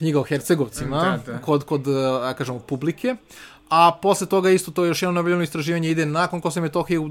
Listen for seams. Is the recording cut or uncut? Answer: uncut